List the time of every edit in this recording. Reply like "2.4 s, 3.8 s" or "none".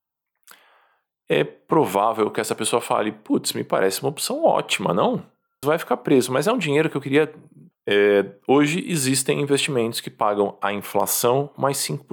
5.6 s, 7.7 s